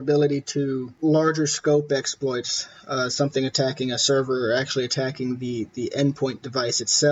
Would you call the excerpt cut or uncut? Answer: uncut